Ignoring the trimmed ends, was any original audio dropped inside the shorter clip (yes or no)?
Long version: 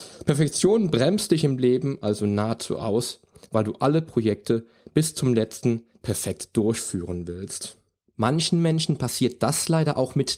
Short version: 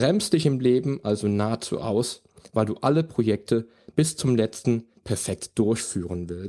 no